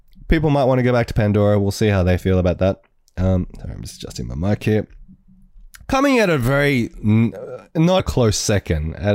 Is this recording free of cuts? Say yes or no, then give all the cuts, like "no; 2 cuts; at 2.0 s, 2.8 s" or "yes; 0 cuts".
no; 2 cuts; at 5.8 s, 8.0 s